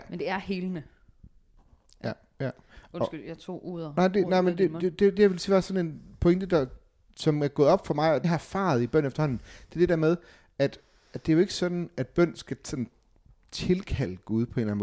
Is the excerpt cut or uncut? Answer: cut